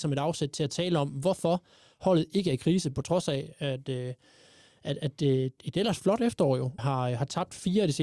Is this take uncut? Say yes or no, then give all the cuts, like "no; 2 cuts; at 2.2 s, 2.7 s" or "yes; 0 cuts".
no; 2 cuts; at 5.6 s, 6.8 s